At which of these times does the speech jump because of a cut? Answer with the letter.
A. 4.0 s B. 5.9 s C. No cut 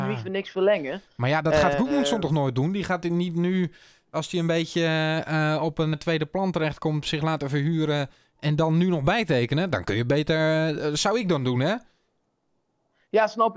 B